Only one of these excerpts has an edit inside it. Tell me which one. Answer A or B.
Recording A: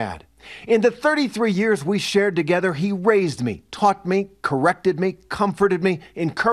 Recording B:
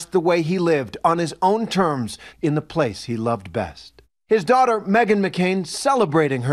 B